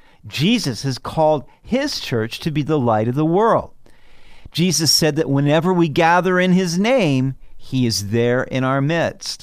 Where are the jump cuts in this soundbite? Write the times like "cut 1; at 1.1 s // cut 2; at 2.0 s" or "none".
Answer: none